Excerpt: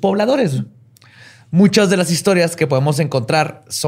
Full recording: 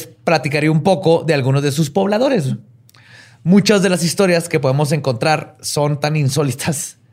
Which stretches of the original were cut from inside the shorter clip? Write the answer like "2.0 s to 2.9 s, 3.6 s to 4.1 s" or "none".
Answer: none